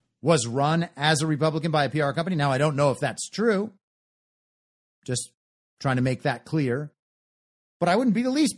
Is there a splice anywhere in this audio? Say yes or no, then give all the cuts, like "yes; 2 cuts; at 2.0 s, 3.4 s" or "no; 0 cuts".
no; 0 cuts